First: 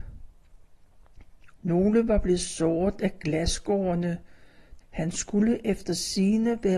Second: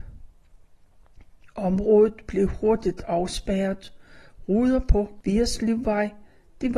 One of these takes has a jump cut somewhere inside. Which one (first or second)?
first